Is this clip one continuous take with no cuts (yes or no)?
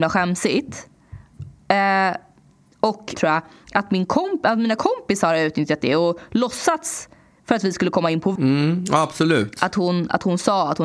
no